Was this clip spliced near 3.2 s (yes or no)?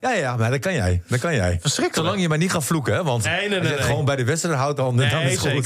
yes